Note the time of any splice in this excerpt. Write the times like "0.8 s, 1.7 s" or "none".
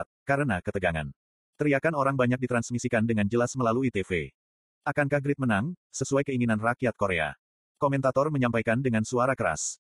1.4 s